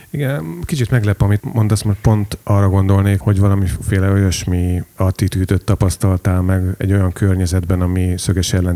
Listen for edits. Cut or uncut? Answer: uncut